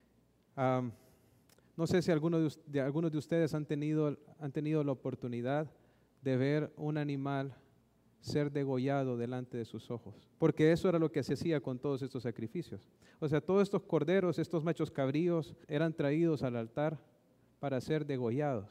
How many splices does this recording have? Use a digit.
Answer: 2